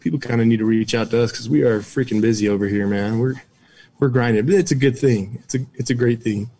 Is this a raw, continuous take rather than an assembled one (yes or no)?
yes